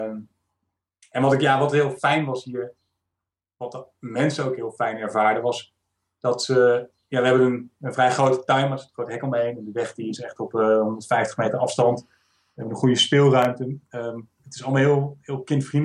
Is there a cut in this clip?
no; 0 cuts

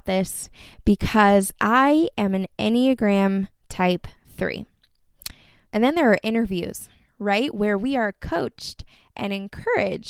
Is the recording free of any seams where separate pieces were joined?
no; 1 cut; at 5.7 s

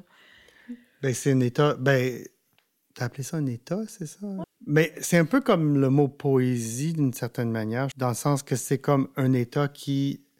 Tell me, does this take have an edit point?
yes; 2 cuts; at 4.4 s, 7.9 s

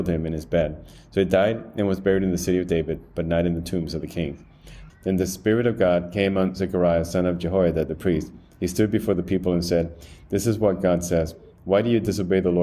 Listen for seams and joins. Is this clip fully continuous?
no; 1 cut; at 4.9 s

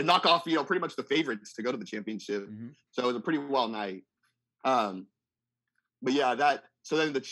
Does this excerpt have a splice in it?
no; 0 cuts

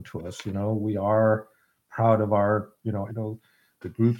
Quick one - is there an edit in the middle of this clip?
yes; 1 cut; at 3.1 s

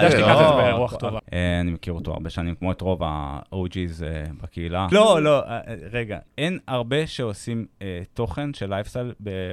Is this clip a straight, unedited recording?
no; 3 cuts; at 1.2 s, 4.9 s, 6.3 s

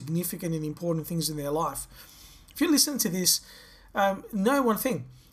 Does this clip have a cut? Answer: no; 0 cuts

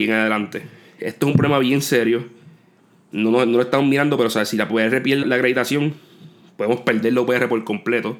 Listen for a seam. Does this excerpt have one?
yes; 1 cut; at 5.2 s

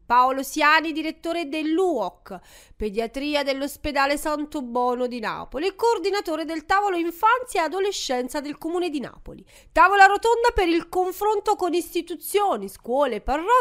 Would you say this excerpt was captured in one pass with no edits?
no; 1 cut; at 9.6 s

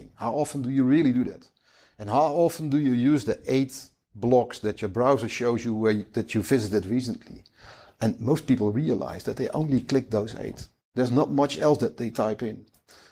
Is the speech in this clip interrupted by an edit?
no; 0 cuts

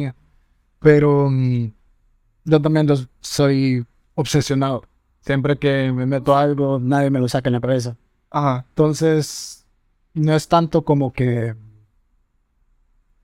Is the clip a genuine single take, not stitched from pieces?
yes; 0 cuts

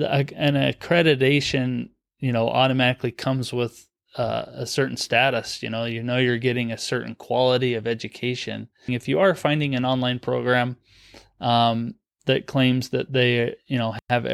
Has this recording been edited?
yes; 1 cut; at 8.9 s

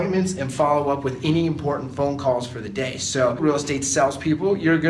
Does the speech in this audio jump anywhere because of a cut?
yes; 1 cut; at 3.4 s

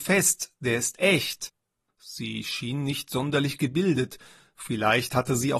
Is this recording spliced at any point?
yes; 1 cut; at 1.9 s

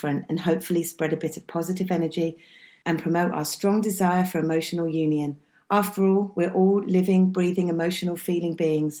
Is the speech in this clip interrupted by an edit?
no; 0 cuts

